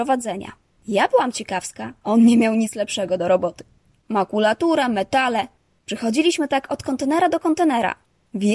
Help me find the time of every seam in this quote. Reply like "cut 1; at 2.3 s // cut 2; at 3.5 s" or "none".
cut 1; at 4.0 s